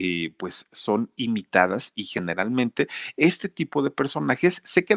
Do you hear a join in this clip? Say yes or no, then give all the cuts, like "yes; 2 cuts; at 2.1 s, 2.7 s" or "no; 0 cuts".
no; 0 cuts